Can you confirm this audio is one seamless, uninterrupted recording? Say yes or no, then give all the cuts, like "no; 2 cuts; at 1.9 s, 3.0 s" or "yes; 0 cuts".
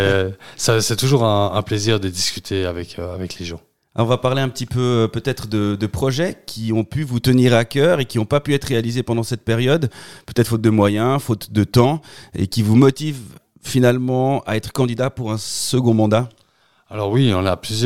yes; 0 cuts